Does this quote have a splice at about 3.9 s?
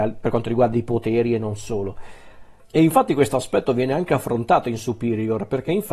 no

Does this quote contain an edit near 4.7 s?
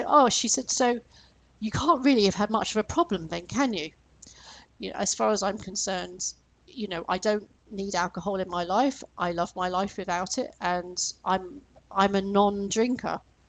yes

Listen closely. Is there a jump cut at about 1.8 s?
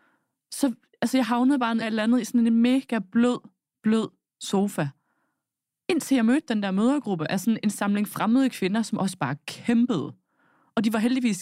yes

